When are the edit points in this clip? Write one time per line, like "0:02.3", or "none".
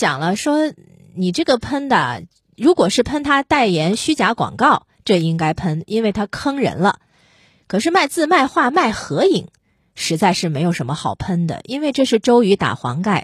none